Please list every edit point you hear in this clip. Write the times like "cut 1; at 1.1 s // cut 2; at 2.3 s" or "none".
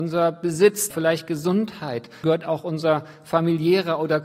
cut 1; at 0.9 s // cut 2; at 2.2 s